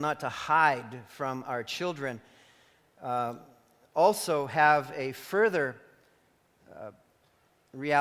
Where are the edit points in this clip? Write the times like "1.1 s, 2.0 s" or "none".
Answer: none